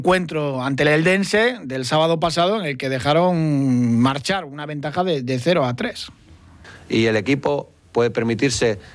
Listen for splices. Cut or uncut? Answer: uncut